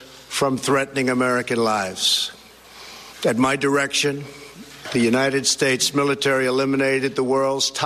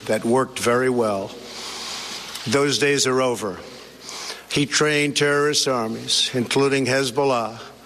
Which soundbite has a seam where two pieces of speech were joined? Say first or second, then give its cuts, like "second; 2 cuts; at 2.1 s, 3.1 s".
second; 2 cuts; at 2.4 s, 4.5 s